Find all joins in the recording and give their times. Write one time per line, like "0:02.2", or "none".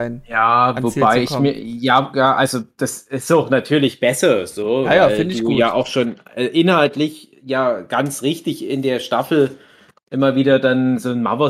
none

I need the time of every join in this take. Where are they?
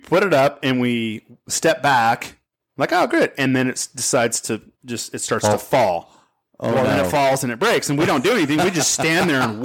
none

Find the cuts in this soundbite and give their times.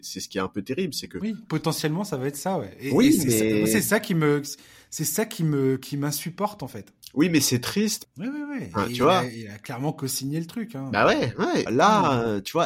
0:08.0
0:11.7

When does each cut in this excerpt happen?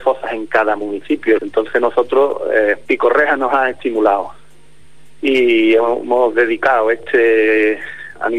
0:01.4

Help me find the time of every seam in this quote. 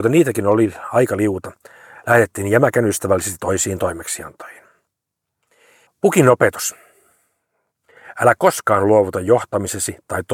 0:05.9

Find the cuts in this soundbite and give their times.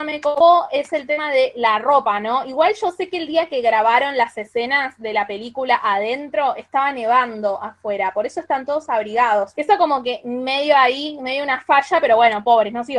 0:09.5

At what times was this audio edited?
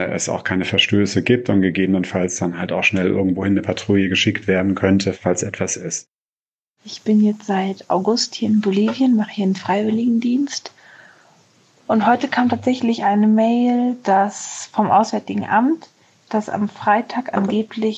0:05.1

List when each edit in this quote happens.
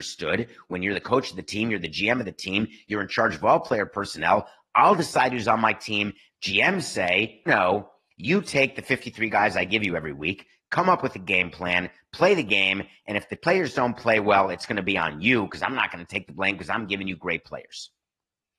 0:06.3
0:07.5

